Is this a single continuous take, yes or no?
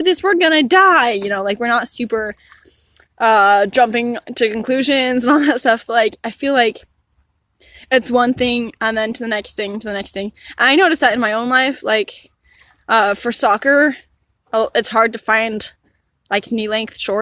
yes